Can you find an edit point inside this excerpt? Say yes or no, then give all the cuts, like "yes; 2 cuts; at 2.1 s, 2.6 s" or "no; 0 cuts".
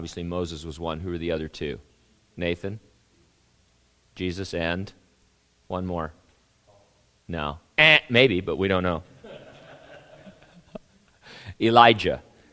no; 0 cuts